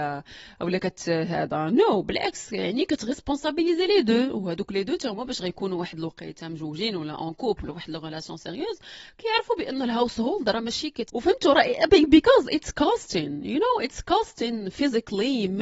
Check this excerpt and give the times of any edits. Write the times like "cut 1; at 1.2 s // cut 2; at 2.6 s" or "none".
cut 1; at 11.1 s